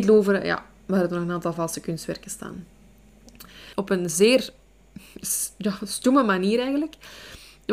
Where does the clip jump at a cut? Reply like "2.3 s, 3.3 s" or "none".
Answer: 3.7 s